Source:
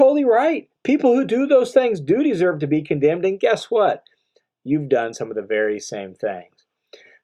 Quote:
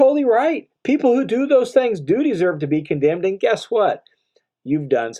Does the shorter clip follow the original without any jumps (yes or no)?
yes